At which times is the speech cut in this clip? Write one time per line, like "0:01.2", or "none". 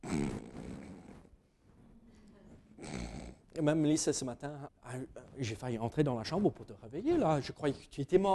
0:04.7